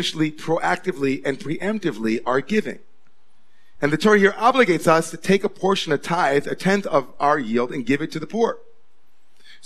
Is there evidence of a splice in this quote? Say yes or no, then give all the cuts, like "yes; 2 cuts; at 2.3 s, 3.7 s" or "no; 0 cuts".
no; 0 cuts